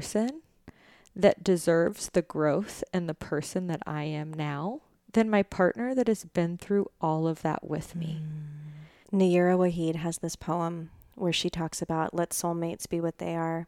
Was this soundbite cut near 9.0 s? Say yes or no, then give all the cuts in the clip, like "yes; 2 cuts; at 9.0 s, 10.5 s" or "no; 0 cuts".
yes; 1 cut; at 9.0 s